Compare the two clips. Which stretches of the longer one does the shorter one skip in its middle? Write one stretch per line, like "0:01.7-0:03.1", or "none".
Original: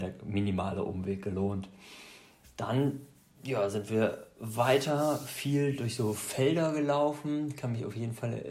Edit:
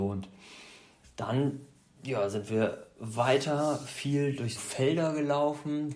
0:06.0-0:06.1